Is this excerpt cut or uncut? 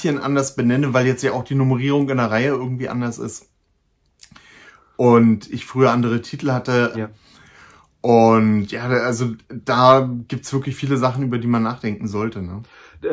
cut